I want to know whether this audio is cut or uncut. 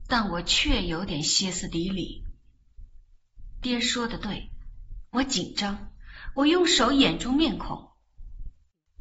uncut